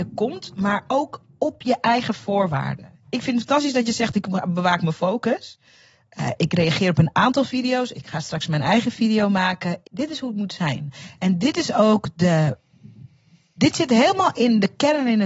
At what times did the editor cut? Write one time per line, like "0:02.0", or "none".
0:09.8